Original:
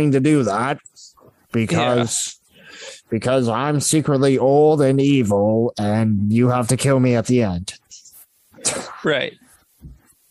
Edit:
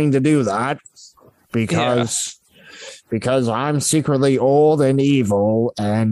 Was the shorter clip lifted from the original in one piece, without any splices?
yes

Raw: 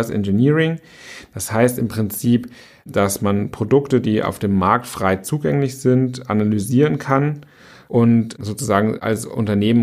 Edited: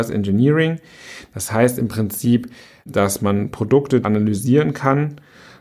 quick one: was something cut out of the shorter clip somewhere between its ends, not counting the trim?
yes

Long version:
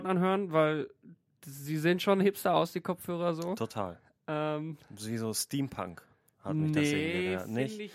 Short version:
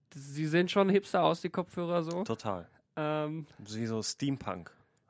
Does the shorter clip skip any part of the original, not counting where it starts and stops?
no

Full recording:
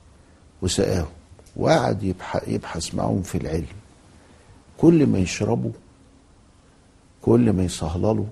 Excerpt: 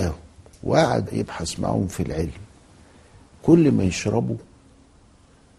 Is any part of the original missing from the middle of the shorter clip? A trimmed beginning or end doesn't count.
yes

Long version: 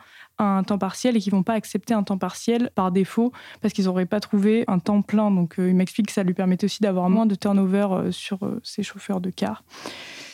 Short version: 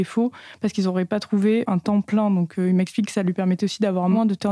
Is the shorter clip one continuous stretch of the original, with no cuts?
yes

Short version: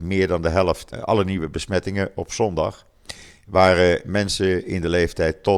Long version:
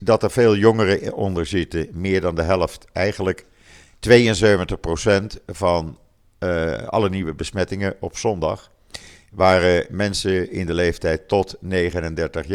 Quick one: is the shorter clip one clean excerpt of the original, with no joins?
no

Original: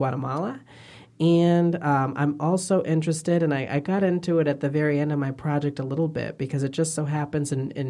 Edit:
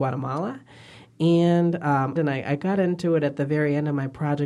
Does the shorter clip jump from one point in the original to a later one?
yes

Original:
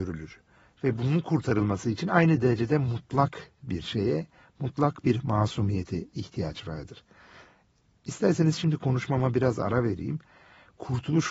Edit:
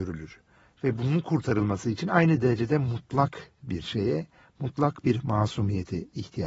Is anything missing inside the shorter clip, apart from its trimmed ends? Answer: no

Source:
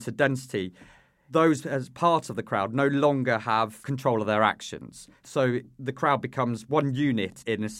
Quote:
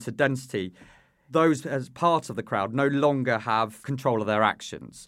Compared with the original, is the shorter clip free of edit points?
yes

